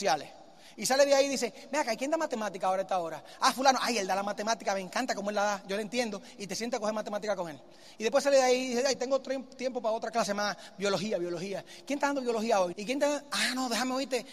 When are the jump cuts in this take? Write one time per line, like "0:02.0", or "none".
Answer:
0:12.7